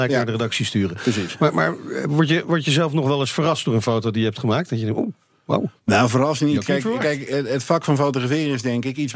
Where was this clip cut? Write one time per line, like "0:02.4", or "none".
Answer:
none